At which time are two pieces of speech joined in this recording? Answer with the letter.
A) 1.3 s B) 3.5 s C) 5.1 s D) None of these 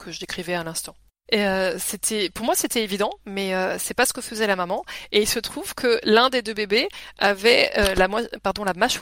A